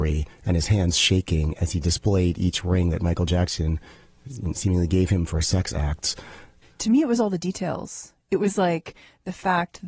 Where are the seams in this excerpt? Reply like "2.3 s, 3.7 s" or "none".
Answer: 6.6 s